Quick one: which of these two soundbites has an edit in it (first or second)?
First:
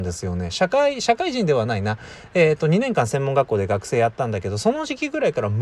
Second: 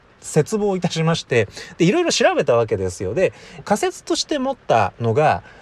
second